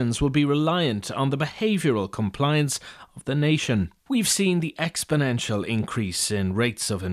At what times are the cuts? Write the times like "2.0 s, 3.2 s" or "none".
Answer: 4.0 s